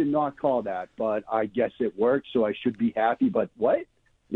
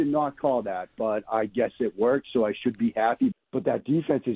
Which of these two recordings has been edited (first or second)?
second